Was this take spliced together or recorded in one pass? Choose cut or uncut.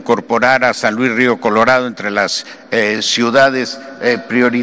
uncut